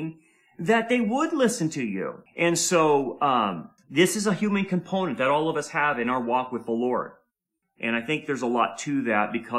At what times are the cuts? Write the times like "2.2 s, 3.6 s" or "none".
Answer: 2.3 s, 3.8 s, 7.6 s